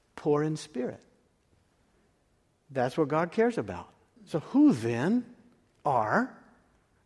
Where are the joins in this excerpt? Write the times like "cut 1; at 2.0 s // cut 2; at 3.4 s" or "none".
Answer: cut 1; at 4.2 s